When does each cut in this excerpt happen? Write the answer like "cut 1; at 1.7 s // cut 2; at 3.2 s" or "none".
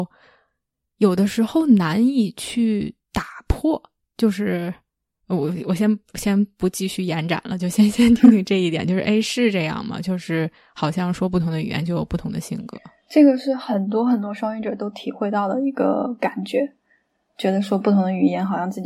none